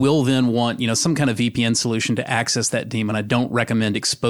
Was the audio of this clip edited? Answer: no; 0 cuts

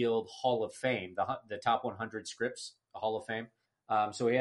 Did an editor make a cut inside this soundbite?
no; 0 cuts

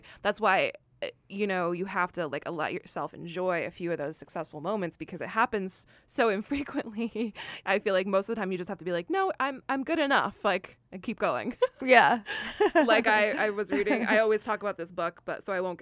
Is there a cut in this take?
no; 0 cuts

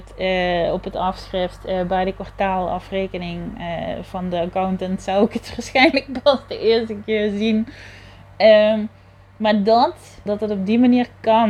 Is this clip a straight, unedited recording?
no; 1 cut; at 10.3 s

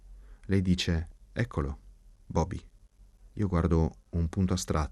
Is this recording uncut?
yes; 0 cuts

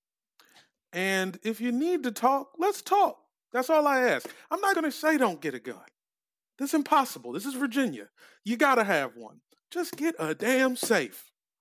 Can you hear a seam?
yes; 2 cuts; at 3.4 s, 4.7 s

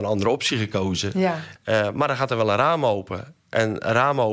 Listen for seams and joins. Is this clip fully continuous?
no; 1 cut; at 1.6 s

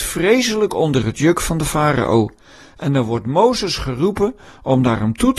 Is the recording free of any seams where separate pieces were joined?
yes; 0 cuts

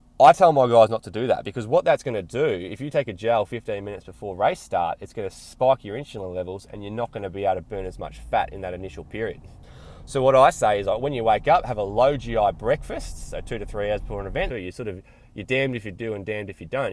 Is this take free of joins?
no; 1 cut; at 14.5 s

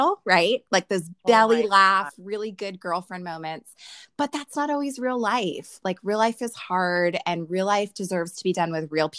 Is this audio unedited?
yes; 0 cuts

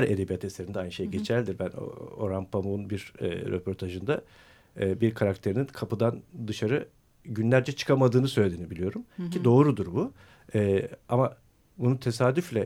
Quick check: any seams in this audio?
no; 0 cuts

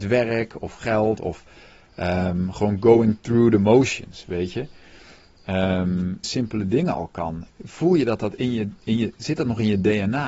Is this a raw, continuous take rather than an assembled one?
no; 2 cuts; at 6.2 s, 7.5 s

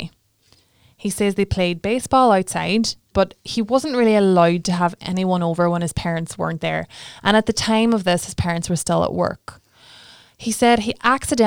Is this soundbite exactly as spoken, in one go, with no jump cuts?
no; 1 cut; at 3.1 s

